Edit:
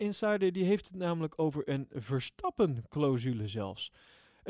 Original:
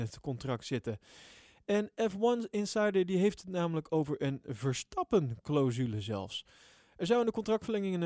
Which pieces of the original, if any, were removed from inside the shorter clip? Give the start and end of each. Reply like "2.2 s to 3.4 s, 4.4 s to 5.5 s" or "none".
none

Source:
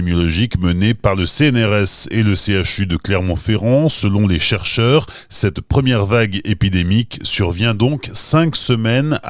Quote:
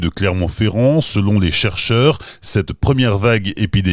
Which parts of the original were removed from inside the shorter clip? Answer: none

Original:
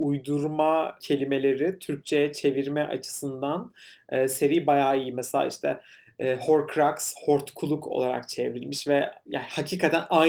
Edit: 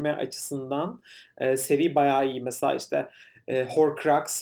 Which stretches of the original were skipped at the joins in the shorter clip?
none

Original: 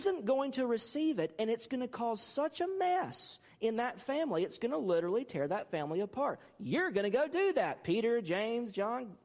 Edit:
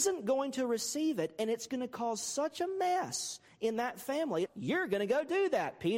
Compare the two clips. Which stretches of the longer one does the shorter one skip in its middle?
4.5 s to 6.5 s

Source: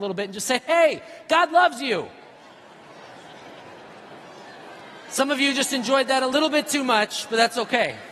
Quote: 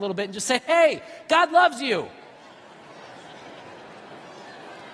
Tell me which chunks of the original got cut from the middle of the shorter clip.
none

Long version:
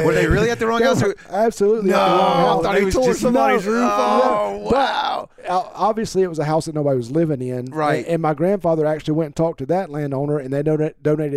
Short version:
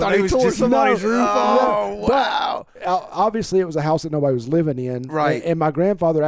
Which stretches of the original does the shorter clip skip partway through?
none

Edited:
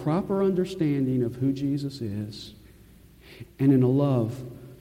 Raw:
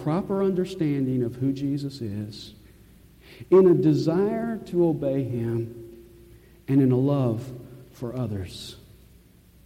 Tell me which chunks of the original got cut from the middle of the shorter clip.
3.4 s to 6.5 s

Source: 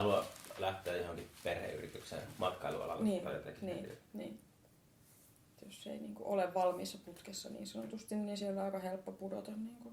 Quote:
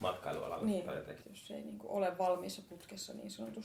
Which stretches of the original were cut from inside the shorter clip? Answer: 3.6 s to 5.6 s

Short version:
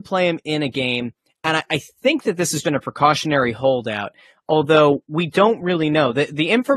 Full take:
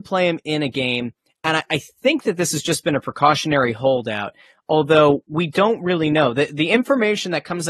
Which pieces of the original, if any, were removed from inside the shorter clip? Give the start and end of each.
2.6 s to 2.8 s

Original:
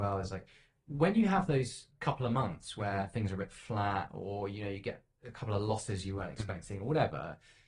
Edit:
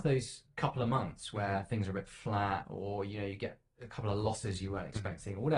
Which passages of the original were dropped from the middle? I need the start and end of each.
none

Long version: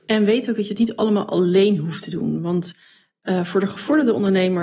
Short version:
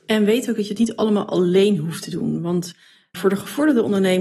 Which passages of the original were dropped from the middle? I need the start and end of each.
3.1 s to 3.5 s

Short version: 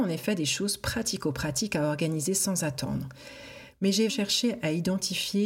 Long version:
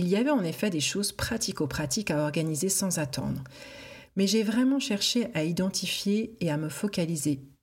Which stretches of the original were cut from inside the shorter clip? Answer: 4.4 s to 4.8 s

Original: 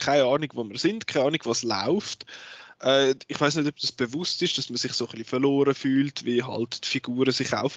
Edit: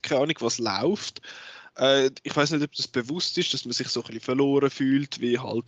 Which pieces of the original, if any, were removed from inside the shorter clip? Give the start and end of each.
none

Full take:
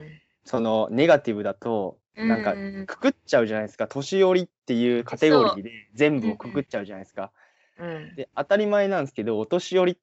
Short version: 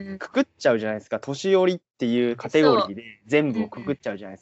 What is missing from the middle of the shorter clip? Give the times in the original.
none

